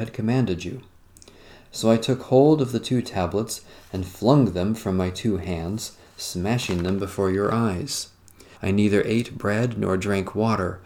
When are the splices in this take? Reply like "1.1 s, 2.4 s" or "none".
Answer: 8.5 s